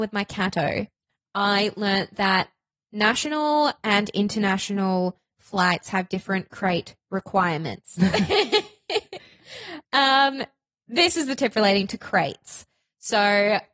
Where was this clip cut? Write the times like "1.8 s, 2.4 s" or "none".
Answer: 8.0 s